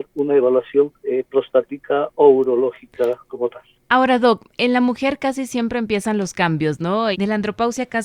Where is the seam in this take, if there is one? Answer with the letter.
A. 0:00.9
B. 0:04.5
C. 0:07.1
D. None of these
C